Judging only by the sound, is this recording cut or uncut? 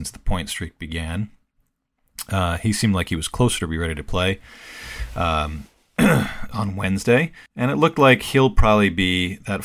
cut